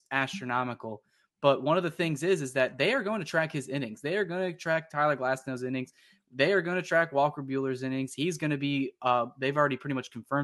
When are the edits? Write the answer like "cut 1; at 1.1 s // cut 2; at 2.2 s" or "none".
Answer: none